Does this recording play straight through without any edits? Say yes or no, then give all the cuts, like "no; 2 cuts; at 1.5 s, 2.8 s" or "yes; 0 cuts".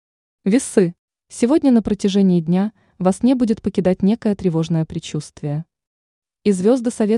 yes; 0 cuts